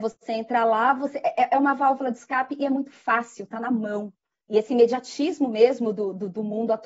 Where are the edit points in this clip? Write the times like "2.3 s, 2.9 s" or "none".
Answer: none